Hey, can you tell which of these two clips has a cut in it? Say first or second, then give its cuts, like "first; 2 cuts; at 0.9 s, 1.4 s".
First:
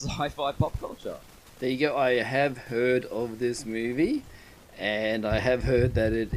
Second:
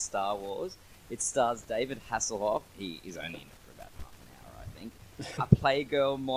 second; 2 cuts; at 2.7 s, 5.4 s